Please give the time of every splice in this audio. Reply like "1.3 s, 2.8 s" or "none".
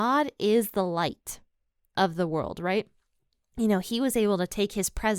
none